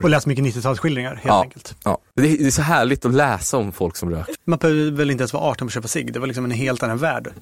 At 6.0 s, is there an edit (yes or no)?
no